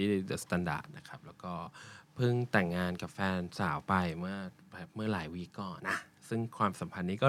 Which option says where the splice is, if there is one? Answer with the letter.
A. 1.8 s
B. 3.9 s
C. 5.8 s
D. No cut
C